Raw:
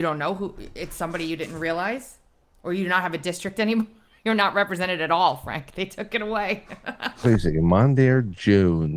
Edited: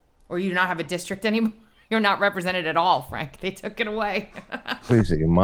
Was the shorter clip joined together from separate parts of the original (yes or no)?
no